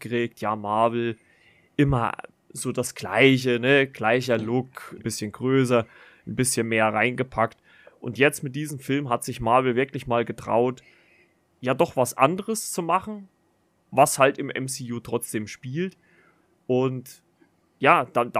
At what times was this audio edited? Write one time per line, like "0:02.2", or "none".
0:05.0